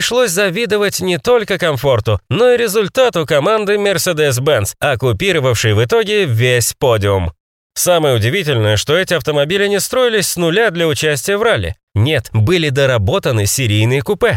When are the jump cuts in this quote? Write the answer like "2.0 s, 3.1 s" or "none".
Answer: none